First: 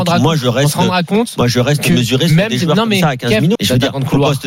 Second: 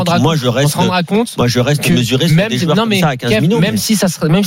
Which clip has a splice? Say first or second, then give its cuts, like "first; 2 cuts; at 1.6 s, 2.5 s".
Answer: first; 1 cut; at 3.6 s